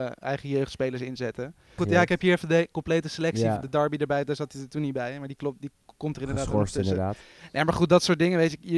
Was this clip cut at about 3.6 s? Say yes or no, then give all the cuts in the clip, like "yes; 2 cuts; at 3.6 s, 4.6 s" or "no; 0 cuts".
yes; 2 cuts; at 1.8 s, 3.6 s